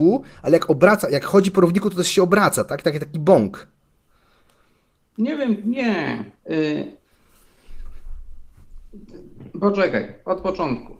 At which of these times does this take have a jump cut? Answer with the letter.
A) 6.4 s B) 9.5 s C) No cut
A